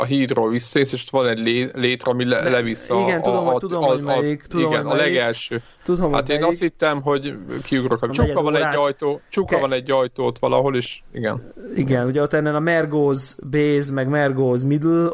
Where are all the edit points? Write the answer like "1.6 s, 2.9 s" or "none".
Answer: 8.1 s